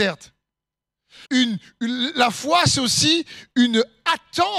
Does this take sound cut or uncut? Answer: cut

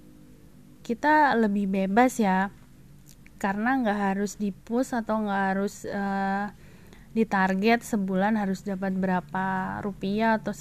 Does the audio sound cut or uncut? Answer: uncut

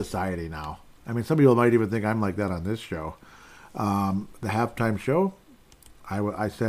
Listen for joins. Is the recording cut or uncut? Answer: uncut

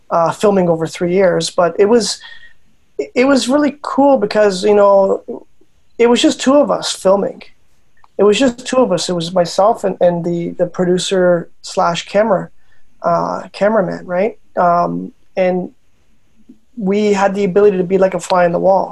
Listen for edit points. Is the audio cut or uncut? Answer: uncut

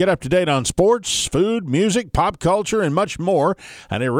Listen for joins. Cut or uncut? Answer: uncut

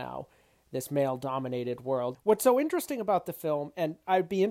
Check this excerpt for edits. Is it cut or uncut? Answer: cut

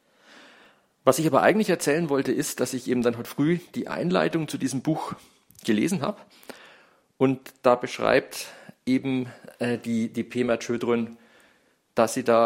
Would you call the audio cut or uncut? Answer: uncut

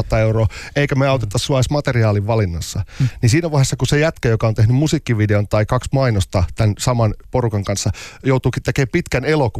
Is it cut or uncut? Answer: uncut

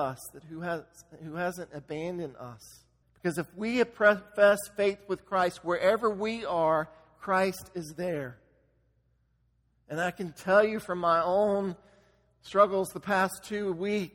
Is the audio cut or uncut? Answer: cut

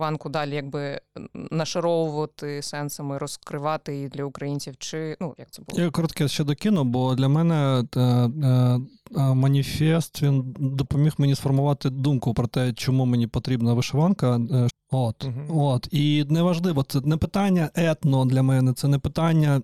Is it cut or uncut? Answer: cut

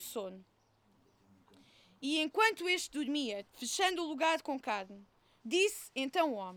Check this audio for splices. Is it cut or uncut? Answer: cut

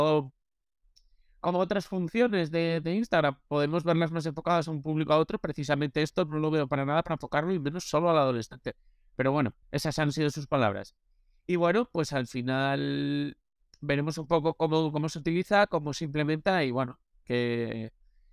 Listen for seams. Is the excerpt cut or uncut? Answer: cut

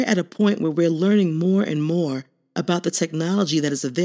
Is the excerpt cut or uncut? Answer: uncut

